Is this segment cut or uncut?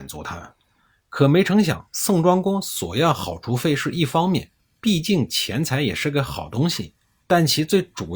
uncut